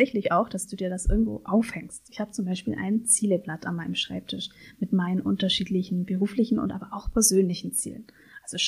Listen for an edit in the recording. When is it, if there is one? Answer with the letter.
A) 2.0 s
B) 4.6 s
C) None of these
C